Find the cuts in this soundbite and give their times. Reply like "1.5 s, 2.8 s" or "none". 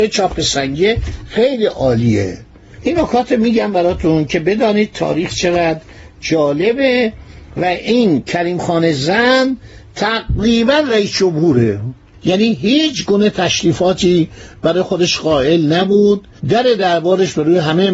16.4 s